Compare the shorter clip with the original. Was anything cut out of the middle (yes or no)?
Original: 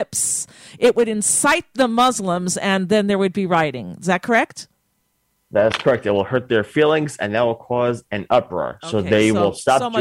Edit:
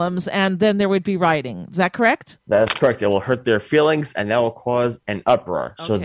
yes